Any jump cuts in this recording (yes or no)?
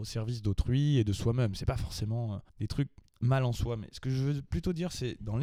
yes